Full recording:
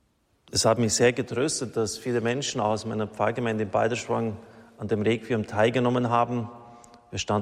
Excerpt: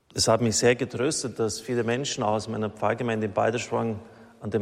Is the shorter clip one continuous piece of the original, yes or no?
yes